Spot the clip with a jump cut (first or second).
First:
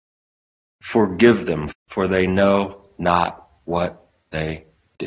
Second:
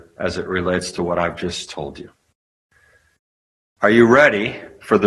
first